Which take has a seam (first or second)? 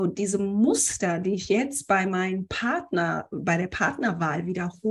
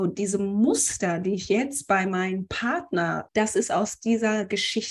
second